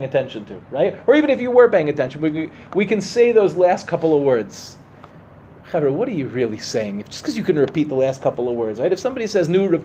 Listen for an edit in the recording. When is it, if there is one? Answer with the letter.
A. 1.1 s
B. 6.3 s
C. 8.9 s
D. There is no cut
D